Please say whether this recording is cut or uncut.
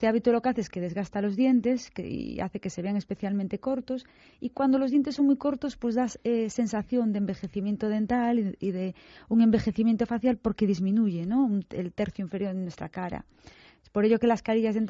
uncut